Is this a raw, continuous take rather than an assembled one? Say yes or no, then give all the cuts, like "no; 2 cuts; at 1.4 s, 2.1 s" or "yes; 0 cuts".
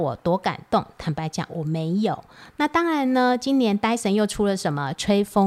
yes; 0 cuts